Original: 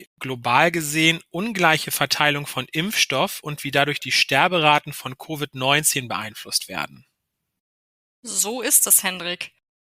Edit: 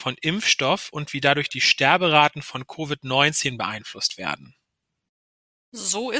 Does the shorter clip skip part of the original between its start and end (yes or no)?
no